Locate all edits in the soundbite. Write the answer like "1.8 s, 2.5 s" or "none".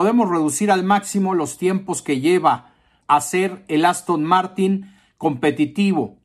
3.0 s